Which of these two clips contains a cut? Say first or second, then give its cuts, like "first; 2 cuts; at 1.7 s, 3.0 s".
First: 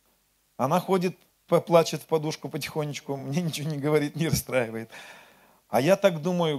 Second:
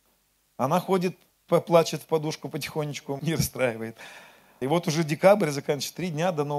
second; 2 cuts; at 3.2 s, 4.6 s